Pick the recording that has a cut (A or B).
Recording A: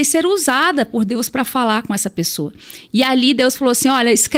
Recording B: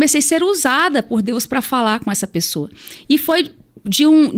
B